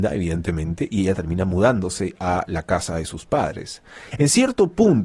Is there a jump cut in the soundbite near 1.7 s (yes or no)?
no